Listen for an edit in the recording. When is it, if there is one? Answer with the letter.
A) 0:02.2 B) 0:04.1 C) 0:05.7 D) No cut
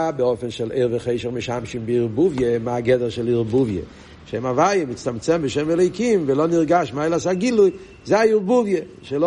B